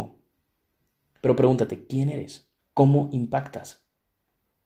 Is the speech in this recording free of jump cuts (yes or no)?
no